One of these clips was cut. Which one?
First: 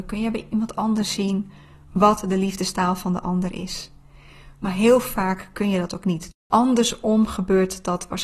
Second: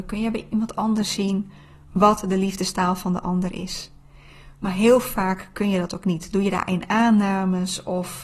first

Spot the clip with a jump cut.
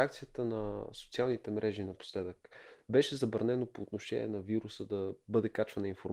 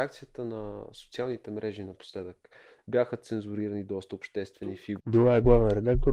second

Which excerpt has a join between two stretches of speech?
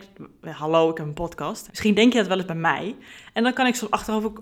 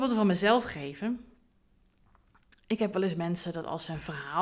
first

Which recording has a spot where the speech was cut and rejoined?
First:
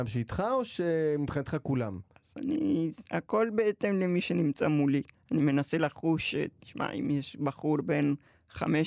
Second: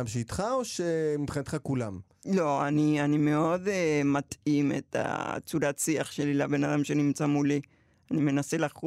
first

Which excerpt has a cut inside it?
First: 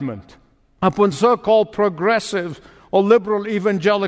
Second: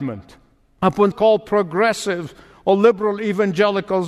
second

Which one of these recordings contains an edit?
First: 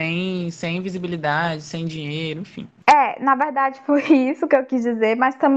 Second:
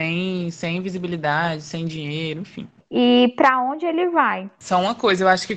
second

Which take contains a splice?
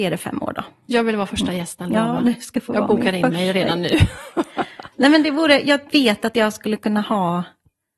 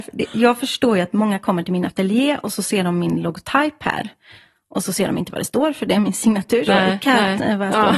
second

